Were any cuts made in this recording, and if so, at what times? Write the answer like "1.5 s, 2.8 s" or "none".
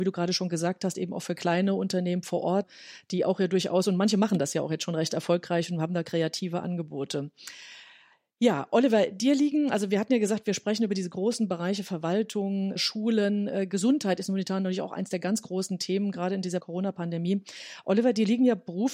none

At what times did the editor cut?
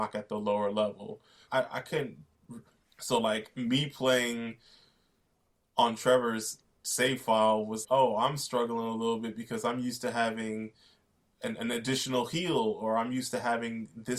1.5 s, 2.8 s, 7.8 s

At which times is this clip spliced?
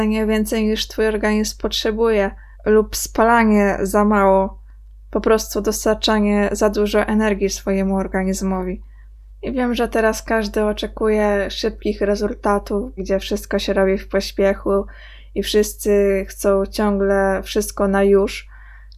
2.5 s, 9.3 s, 13.0 s

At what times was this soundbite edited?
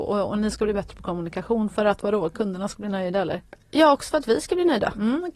none

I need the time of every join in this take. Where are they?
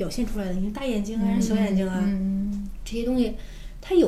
none

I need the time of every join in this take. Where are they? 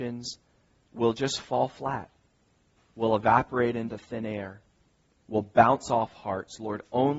none

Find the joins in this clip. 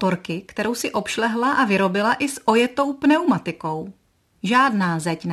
4.3 s

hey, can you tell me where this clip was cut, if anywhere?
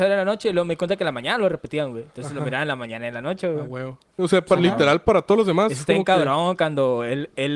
4.2 s

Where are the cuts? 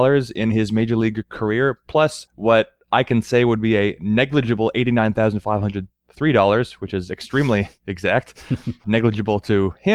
8.8 s

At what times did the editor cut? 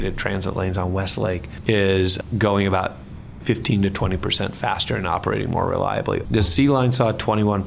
6.2 s

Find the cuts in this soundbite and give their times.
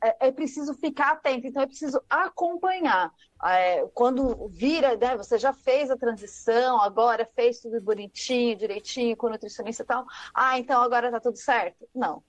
none

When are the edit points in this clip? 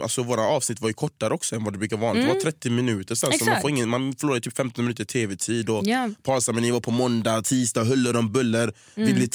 none

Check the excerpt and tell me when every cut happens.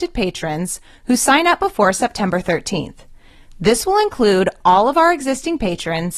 none

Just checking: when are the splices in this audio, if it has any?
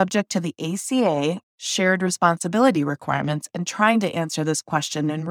1.4 s

